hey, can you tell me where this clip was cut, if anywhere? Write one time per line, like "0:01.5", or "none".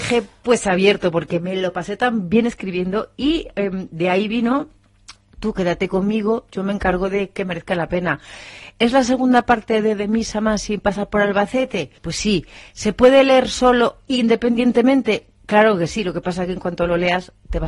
0:12.0